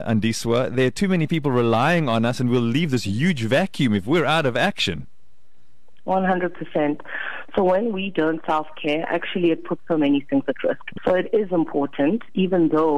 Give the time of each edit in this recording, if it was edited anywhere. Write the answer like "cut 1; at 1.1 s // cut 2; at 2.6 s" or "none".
cut 1; at 11.0 s